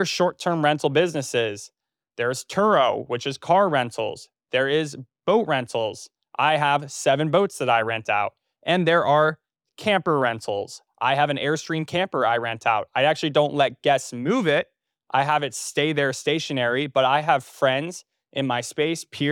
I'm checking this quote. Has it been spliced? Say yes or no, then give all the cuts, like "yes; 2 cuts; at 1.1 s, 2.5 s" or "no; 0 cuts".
no; 0 cuts